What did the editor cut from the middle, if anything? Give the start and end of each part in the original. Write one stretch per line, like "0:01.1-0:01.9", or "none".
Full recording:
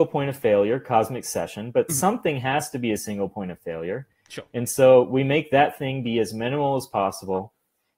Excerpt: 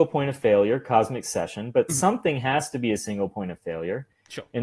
none